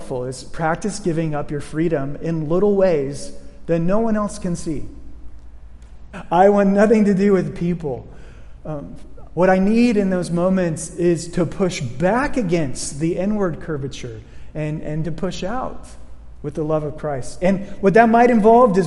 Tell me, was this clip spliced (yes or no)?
yes